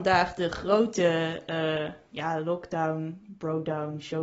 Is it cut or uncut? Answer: uncut